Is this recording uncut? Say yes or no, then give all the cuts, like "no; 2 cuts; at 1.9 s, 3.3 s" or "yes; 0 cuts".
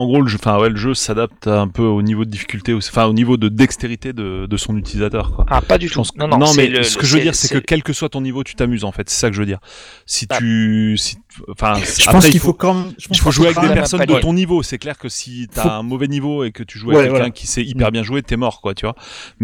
yes; 0 cuts